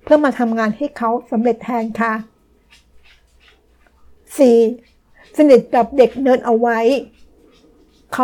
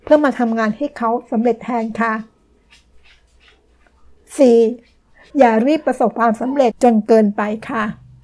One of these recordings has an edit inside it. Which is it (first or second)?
second